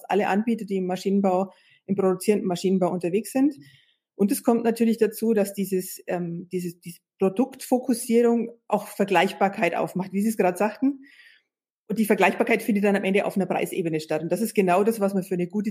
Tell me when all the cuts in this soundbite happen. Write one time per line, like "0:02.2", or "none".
none